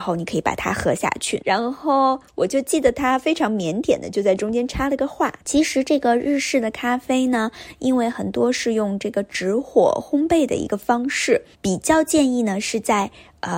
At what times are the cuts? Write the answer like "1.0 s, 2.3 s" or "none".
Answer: 1.4 s, 5.4 s, 11.5 s